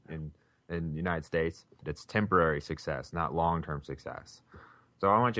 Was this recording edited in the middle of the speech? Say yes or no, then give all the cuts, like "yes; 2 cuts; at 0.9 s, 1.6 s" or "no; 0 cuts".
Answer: yes; 1 cut; at 1.8 s